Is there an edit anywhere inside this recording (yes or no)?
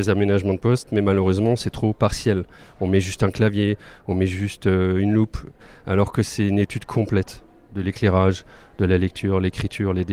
no